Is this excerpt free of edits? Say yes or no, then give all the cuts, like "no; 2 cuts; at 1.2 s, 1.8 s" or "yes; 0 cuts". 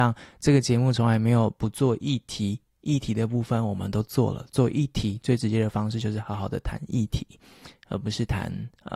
yes; 0 cuts